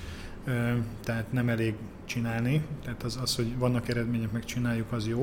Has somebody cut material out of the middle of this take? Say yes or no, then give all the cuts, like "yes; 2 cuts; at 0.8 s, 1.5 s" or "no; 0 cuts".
no; 0 cuts